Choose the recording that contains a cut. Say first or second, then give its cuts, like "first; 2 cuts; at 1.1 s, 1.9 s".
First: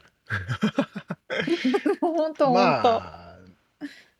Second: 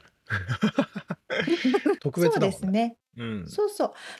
second; 1 cut; at 2.0 s